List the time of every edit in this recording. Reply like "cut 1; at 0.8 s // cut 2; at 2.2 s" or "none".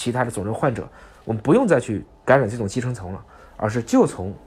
none

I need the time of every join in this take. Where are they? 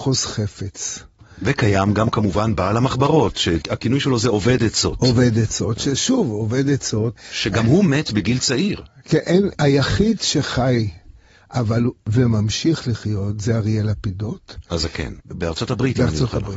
cut 1; at 15.2 s

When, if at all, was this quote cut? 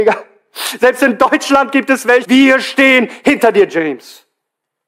cut 1; at 2.2 s

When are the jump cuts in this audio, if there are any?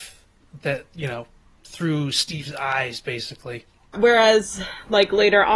cut 1; at 3.9 s

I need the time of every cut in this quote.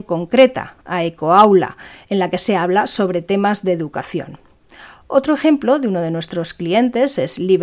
none

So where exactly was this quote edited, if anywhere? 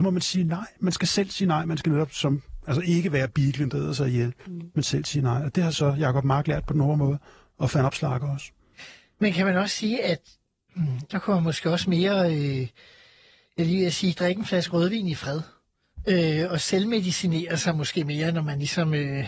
cut 1; at 11.1 s

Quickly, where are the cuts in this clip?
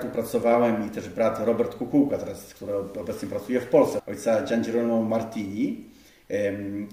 cut 1; at 4.0 s

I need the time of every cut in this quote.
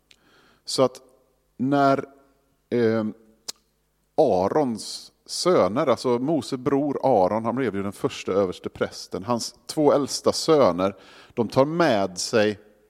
none

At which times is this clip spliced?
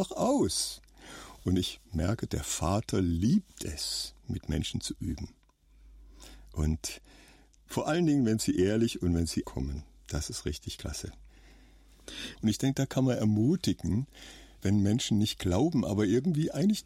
cut 1; at 9.4 s // cut 2; at 12.4 s

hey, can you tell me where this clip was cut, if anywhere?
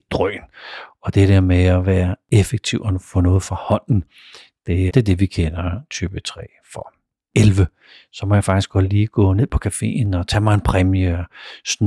cut 1; at 4.9 s // cut 2; at 7.3 s

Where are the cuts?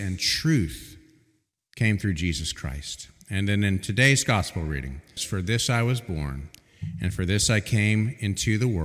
cut 1; at 5.2 s

